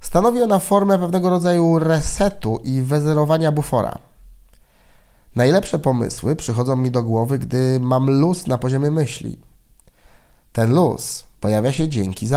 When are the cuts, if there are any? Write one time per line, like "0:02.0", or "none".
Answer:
none